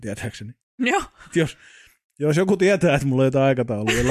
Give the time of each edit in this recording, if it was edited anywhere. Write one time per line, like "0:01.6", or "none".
none